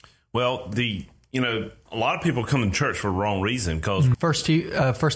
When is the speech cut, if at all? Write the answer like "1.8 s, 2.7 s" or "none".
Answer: 4.1 s